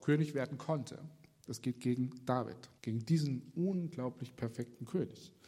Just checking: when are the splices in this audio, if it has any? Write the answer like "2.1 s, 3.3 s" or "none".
1.5 s, 2.8 s